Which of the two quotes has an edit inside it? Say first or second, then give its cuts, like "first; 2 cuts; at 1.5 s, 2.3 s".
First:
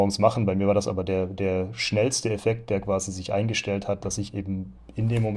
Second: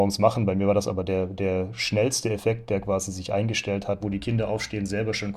second; 1 cut; at 4.0 s